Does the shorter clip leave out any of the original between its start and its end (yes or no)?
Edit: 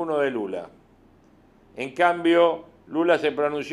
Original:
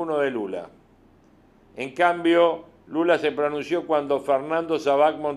no